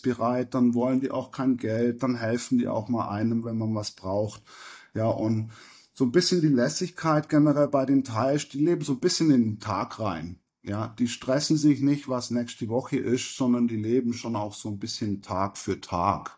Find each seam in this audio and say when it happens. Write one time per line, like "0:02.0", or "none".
none